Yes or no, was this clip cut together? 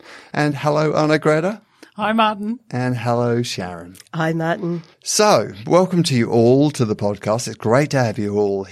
yes